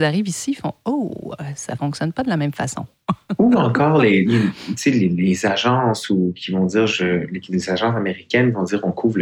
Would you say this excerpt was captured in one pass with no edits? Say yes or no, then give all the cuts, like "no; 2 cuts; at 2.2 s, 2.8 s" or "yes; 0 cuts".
yes; 0 cuts